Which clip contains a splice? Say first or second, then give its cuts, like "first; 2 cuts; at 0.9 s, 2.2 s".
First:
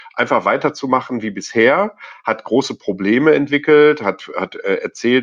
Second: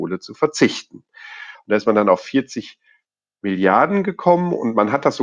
second; 1 cut; at 1.5 s